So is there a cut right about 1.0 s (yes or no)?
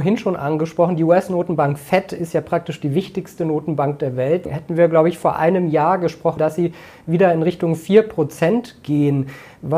no